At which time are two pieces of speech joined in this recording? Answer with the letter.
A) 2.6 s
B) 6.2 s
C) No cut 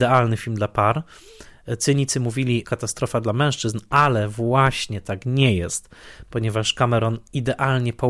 A